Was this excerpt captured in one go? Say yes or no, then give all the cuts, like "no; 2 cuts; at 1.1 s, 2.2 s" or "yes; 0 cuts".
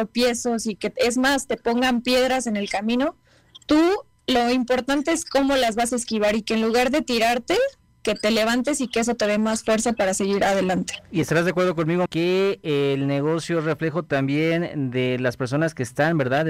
no; 2 cuts; at 11.0 s, 12.1 s